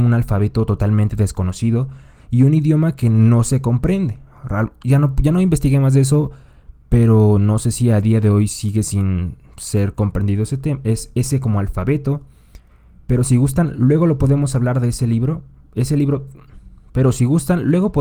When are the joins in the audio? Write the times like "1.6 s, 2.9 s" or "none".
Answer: none

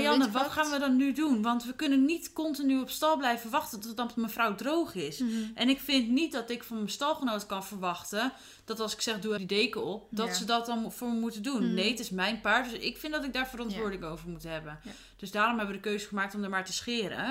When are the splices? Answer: 9.4 s

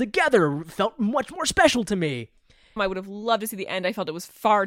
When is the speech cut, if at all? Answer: 2.8 s

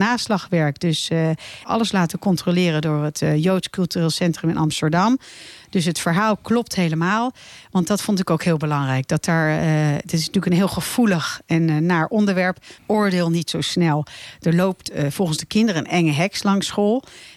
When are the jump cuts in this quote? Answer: 1.6 s, 12.8 s

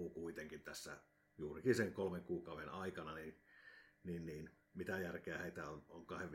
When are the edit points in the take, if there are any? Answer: none

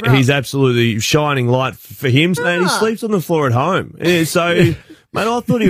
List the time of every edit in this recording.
2.4 s

